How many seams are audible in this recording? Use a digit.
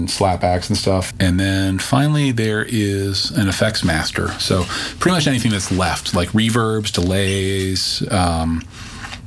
1